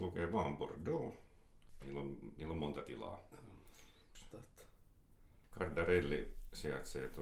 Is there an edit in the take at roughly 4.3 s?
yes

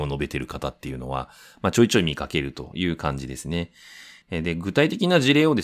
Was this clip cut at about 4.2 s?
yes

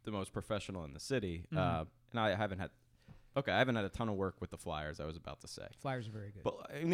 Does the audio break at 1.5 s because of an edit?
no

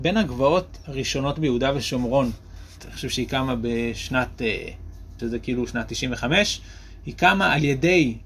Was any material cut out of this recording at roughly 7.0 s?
no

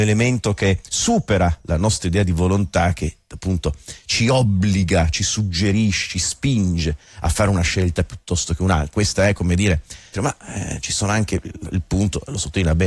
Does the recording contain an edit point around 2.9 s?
no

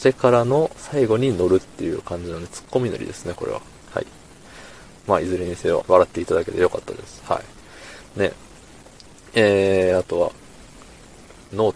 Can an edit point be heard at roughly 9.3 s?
no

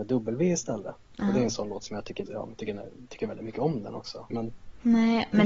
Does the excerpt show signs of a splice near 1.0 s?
no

